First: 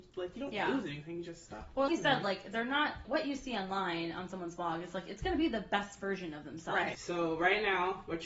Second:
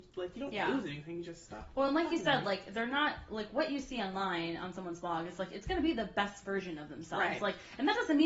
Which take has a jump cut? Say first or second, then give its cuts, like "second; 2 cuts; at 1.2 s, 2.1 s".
first; 3 cuts; at 1.9 s, 3.0 s, 6.9 s